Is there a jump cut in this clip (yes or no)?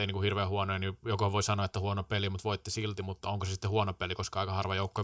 no